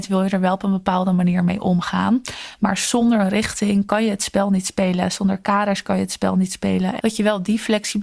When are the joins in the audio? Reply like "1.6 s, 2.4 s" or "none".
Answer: 7.0 s